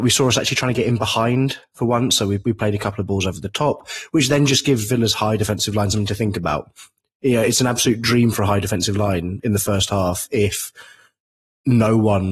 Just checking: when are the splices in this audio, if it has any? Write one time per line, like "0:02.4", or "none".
none